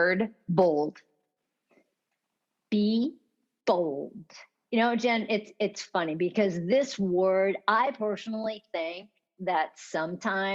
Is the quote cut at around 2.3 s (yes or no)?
no